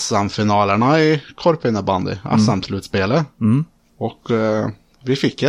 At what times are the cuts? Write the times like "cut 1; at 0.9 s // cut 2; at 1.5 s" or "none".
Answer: none